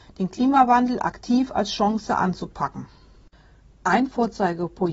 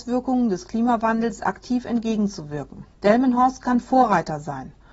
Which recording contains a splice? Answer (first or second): second